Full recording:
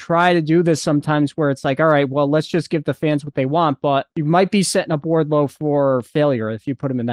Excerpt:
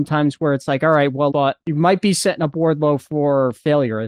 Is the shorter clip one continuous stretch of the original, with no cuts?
no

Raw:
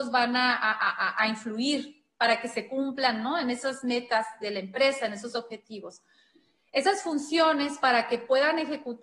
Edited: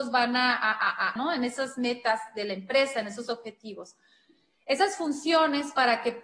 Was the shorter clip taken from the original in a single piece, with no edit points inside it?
no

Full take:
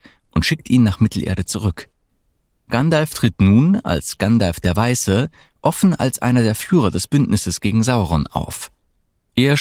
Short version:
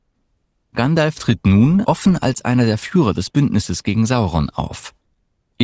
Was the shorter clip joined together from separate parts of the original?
yes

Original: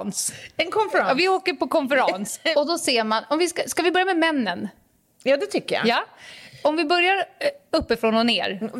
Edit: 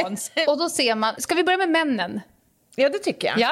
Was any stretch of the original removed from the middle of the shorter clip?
yes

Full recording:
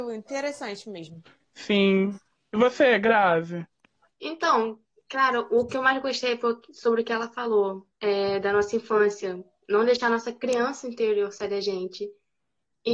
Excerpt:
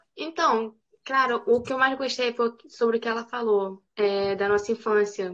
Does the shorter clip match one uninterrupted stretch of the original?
yes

